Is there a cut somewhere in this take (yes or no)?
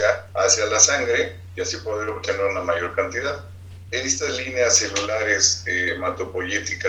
no